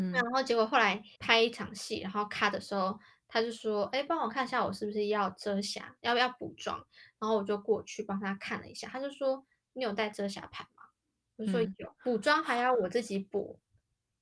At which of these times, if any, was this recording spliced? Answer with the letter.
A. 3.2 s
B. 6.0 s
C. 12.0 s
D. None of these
C